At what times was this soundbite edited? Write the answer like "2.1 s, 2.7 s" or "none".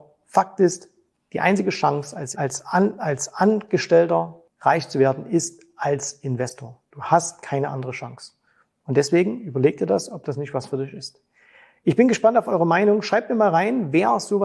2.3 s